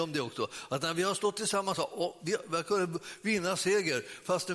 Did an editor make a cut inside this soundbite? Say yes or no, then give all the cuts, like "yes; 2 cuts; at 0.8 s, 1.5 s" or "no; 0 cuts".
no; 0 cuts